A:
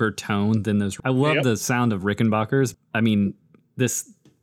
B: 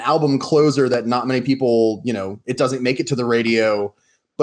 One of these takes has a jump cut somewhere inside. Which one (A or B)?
A